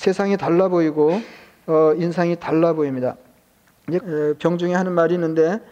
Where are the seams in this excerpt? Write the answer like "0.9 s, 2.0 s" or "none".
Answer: 4.0 s

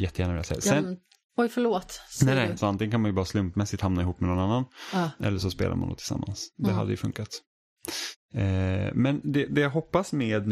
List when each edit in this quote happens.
2.6 s

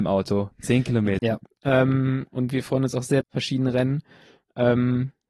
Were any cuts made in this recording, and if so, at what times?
1.2 s, 3.2 s

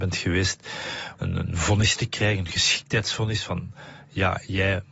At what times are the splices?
1.2 s

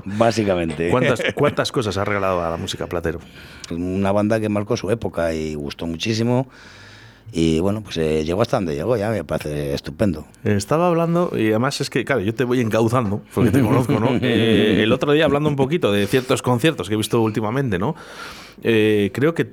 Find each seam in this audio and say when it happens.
3.7 s, 10.3 s

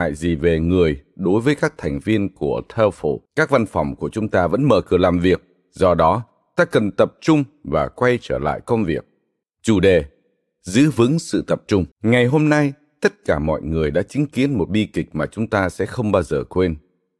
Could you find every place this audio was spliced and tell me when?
3.3 s, 9.4 s, 11.9 s

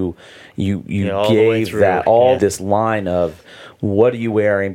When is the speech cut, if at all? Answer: 2.4 s

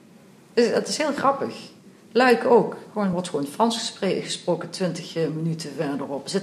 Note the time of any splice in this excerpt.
none

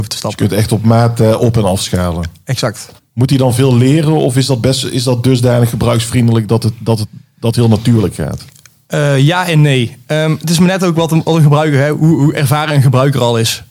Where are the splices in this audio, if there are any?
3.0 s

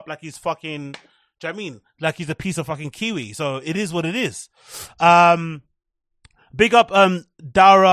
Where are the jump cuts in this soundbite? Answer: none

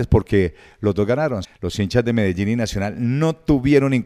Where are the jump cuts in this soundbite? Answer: 1.4 s

